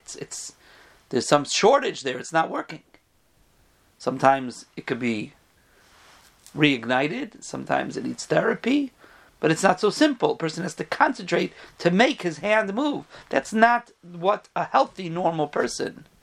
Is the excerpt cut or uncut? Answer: uncut